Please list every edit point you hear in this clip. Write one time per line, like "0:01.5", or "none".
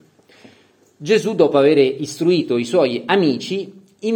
none